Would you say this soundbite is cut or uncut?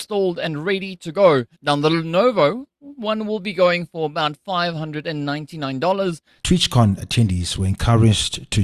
cut